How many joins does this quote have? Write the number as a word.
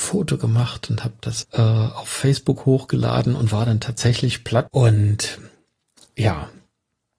two